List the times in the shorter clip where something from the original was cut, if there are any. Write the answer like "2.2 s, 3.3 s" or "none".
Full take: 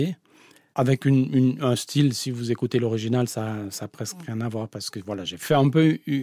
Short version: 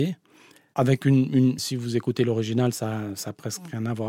1.6 s